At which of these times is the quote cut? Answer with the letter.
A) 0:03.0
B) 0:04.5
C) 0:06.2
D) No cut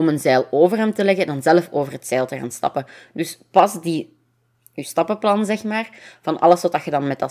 B